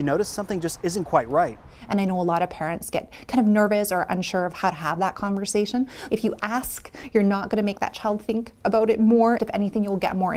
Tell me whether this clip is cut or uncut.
cut